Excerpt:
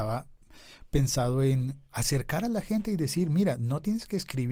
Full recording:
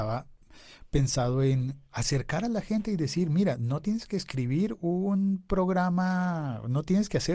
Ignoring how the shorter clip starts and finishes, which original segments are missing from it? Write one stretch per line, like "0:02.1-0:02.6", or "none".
none